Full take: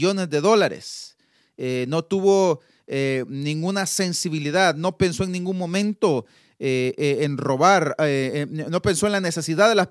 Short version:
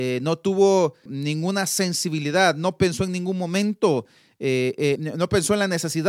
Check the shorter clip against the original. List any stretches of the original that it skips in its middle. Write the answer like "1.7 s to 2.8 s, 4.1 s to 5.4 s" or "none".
2.7 s to 3.3 s, 7.2 s to 8.5 s